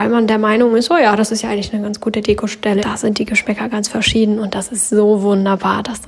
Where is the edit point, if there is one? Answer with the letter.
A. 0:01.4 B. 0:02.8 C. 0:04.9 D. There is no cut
B